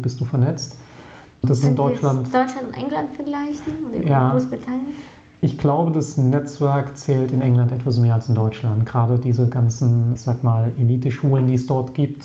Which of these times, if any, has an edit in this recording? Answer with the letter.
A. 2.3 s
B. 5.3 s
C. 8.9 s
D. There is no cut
D